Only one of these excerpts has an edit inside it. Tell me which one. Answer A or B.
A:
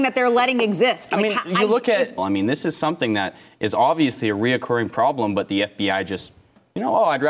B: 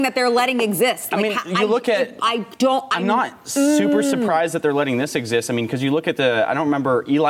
A